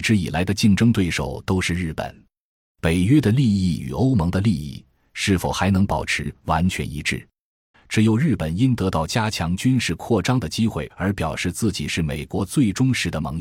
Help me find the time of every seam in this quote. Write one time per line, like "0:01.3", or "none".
0:02.6
0:07.7